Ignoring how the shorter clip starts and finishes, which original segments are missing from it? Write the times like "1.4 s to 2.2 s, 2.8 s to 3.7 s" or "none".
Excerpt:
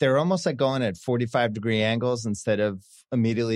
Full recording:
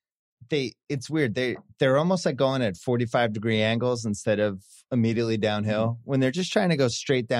none